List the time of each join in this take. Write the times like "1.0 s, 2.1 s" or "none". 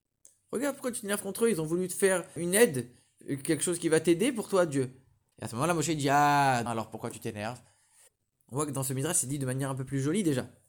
2.4 s, 5.3 s, 6.7 s

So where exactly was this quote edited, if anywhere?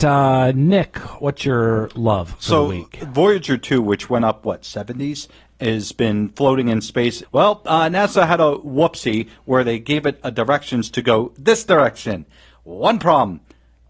7.2 s

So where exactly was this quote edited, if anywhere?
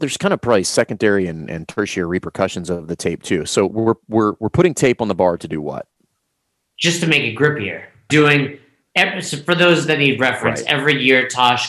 8.1 s

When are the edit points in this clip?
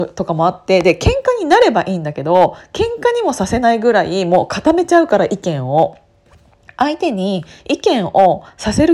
none

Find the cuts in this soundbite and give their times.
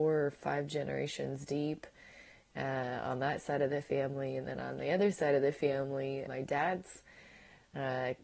6.3 s

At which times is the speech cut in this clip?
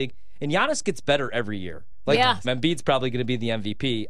2.4 s

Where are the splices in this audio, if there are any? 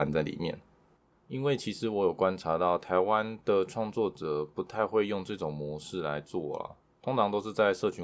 1.1 s

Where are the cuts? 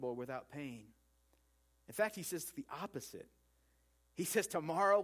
none

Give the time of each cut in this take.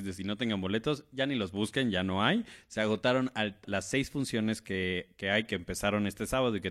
3.6 s

